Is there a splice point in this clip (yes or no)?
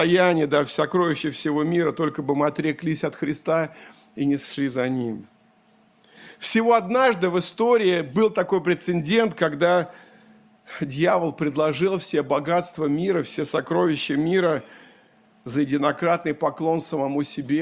no